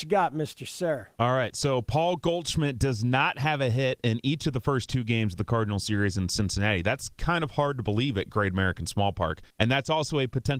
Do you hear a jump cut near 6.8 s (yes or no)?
no